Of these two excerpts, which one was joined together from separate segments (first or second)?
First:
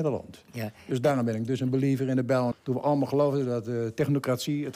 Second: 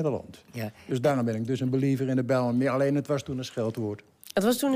first